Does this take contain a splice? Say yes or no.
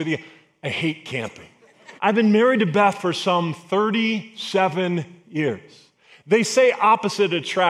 yes